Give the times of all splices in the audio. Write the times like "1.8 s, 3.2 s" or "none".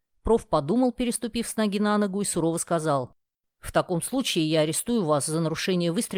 none